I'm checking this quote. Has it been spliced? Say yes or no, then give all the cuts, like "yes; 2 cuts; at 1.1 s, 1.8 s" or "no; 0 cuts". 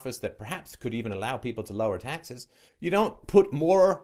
yes; 1 cut; at 2.7 s